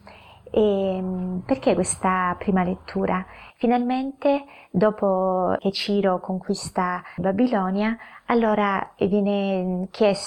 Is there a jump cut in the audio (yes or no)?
yes